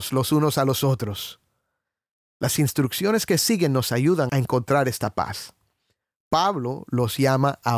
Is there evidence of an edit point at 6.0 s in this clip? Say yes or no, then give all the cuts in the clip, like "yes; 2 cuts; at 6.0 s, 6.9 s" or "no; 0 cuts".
no; 1 cut; at 4.3 s